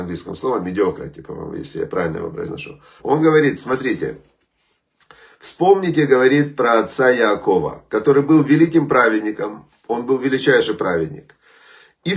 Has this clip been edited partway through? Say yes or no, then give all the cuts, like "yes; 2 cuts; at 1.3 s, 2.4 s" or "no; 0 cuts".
yes; 1 cut; at 3.0 s